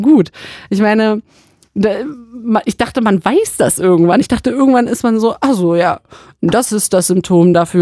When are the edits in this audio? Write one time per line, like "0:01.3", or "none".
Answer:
none

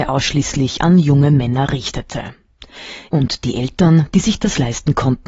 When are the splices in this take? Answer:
0:03.1

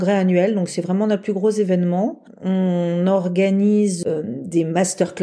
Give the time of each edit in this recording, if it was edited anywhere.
none

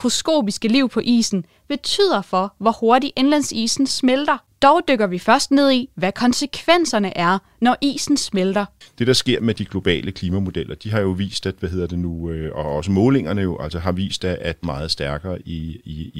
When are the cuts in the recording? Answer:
0:14.6

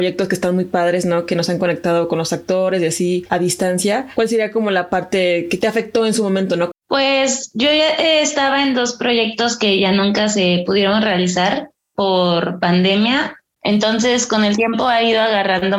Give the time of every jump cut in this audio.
0:06.7
0:13.6

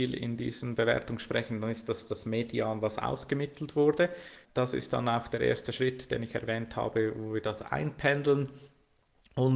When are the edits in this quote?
0:04.4

